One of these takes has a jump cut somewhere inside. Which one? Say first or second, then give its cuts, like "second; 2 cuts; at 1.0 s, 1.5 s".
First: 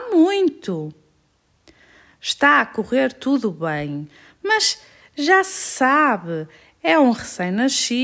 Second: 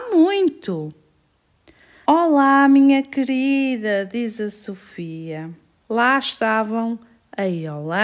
second; 2 cuts; at 2.1 s, 5.8 s